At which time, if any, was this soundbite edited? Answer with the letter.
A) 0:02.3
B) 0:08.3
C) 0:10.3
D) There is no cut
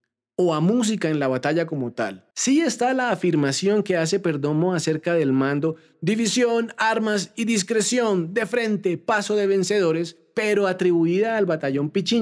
A